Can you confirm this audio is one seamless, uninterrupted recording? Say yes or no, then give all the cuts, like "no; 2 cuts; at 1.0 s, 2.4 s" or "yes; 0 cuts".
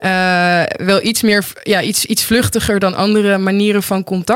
yes; 0 cuts